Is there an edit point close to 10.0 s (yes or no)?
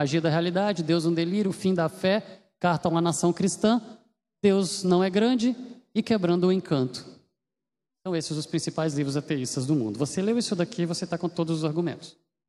no